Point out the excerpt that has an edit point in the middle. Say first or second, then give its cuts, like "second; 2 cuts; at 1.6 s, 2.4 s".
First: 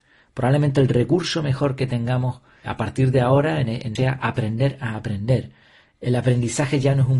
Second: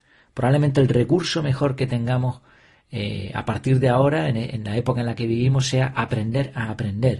first; 2 cuts; at 2.6 s, 4.0 s